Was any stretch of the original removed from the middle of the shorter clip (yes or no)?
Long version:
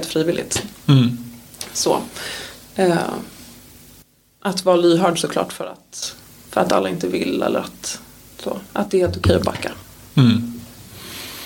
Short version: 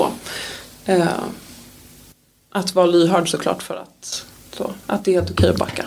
yes